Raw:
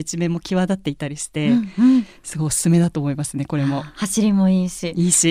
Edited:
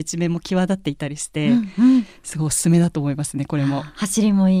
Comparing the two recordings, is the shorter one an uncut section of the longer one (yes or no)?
yes